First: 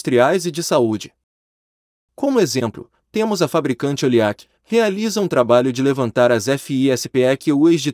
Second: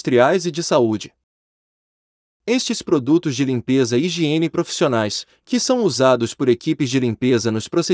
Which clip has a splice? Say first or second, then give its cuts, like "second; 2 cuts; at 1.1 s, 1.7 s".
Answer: first; 2 cuts; at 2.1 s, 4.5 s